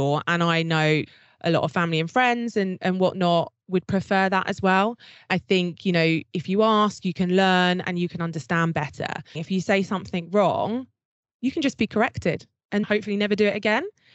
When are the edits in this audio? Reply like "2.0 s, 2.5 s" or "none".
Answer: 9.3 s, 12.8 s